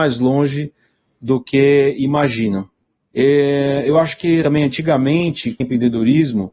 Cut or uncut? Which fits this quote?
cut